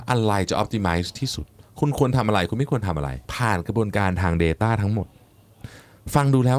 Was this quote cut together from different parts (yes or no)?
yes